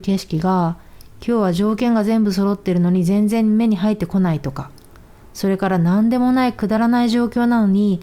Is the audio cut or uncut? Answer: uncut